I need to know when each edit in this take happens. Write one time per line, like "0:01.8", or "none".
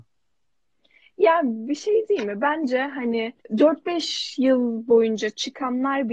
0:03.4